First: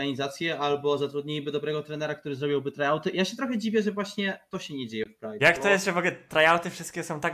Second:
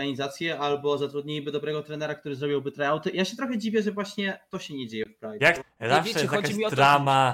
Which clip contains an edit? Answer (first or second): second